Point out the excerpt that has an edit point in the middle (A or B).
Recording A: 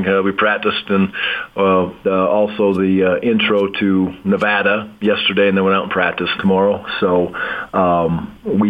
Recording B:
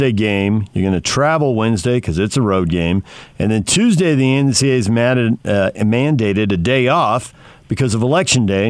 A